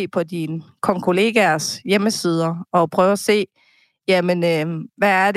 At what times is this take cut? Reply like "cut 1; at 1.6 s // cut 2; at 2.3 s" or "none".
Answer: none